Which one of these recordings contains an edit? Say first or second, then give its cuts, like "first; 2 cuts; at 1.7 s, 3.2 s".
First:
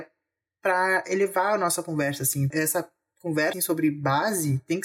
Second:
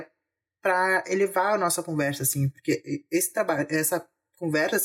first; 2 cuts; at 2.5 s, 3.5 s